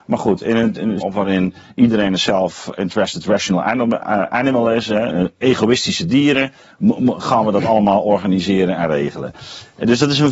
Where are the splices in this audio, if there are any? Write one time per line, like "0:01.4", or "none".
0:01.0